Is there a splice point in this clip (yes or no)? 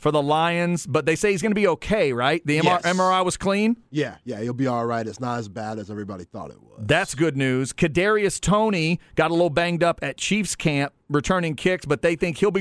no